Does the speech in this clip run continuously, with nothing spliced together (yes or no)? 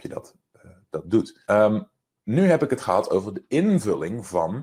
no